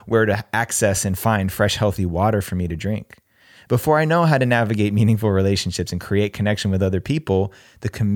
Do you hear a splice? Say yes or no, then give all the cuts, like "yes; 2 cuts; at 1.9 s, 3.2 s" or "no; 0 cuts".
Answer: no; 0 cuts